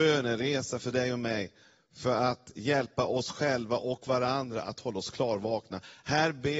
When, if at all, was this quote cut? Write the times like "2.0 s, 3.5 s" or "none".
none